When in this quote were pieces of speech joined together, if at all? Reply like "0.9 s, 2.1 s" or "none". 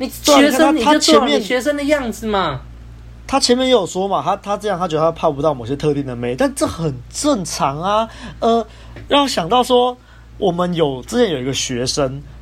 none